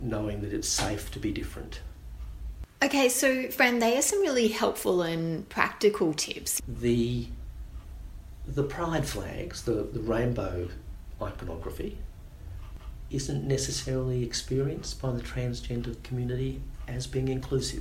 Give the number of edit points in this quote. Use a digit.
1